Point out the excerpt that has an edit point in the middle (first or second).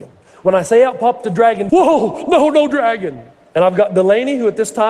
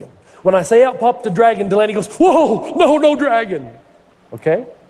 first